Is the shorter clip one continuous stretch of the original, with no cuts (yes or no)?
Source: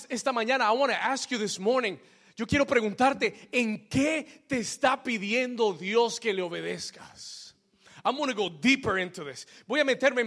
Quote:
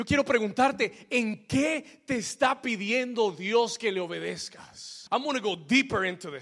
no